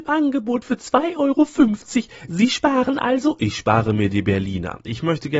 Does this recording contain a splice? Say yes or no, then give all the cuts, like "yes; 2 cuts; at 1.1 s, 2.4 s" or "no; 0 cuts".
no; 0 cuts